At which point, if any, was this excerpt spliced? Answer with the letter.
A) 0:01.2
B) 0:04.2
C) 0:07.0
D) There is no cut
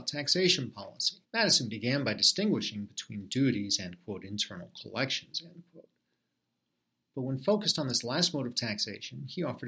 A